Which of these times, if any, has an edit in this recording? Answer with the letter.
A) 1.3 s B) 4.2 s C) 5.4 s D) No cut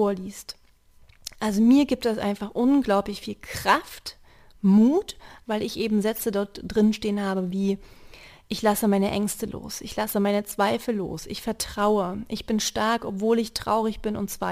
C